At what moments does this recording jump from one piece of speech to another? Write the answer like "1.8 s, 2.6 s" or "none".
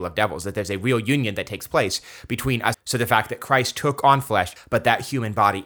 2.7 s, 4.6 s